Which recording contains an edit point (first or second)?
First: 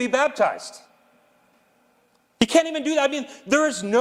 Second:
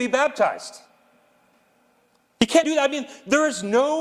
second